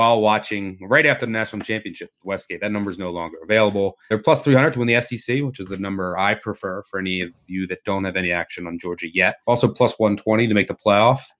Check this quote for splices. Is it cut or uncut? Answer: uncut